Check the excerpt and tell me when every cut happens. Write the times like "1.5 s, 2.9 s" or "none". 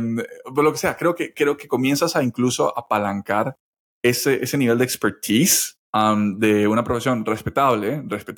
5.8 s